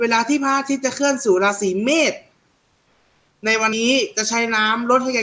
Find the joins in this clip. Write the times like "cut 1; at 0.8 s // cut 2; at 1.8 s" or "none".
cut 1; at 3.7 s